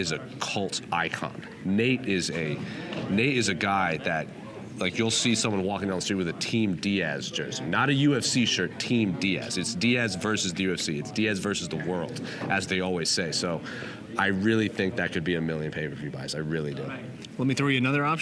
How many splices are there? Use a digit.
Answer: 0